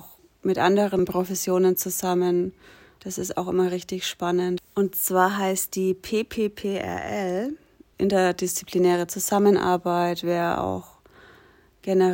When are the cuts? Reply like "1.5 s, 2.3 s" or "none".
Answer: 3.0 s, 4.6 s, 7.9 s